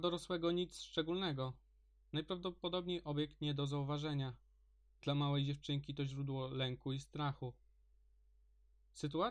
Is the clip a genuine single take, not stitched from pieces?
yes; 0 cuts

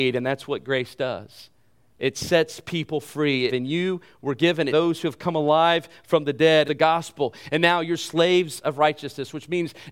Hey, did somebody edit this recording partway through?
yes; 3 cuts; at 3.5 s, 4.7 s, 6.7 s

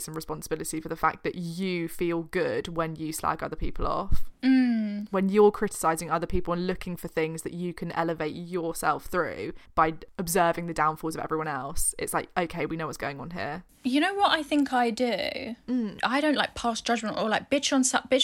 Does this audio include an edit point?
no; 0 cuts

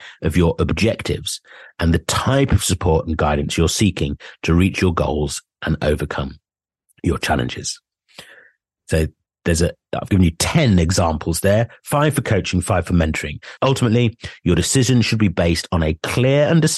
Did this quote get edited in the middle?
yes; 1 cut; at 13.6 s

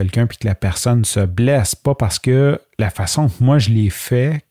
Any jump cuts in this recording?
no; 0 cuts

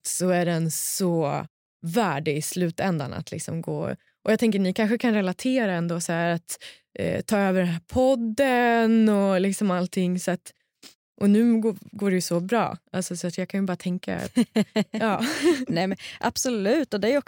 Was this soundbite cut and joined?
no; 0 cuts

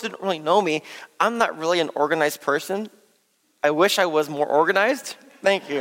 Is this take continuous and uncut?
yes; 0 cuts

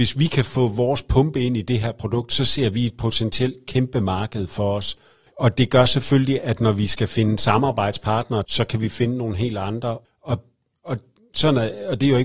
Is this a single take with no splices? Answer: no; 3 cuts; at 5.3 s, 8.4 s, 10.0 s

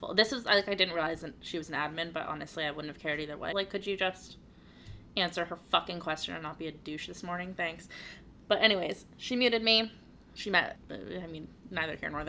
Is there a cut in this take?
yes; 2 cuts; at 3.5 s, 10.7 s

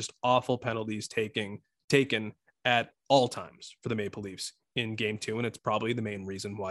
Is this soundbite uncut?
yes; 0 cuts

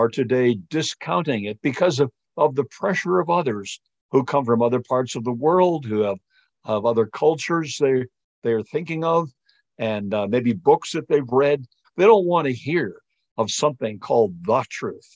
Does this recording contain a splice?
yes; 1 cut; at 11.8 s

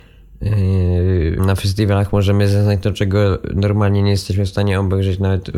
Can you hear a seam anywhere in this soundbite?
yes; 1 cut; at 1.4 s

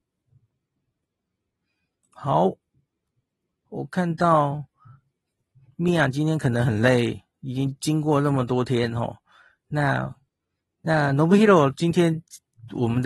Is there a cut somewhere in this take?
no; 0 cuts

